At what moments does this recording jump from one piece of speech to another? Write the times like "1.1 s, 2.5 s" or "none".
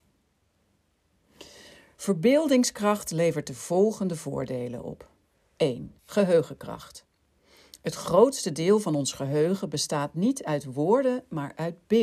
6.0 s

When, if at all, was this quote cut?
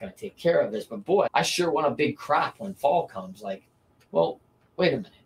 1.3 s

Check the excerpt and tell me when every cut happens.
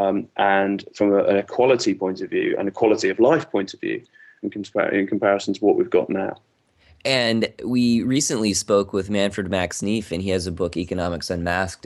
4.4 s

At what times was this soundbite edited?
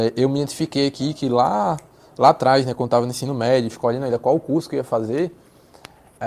none

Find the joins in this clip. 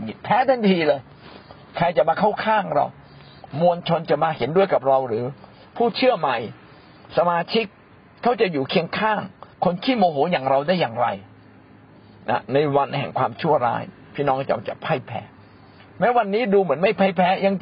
9.5 s

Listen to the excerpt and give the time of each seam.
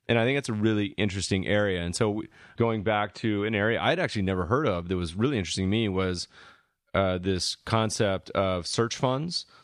2.6 s

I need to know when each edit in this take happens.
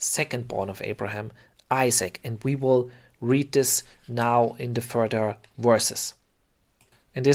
none

